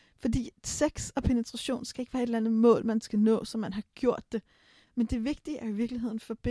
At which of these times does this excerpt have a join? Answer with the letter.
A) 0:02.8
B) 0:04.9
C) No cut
B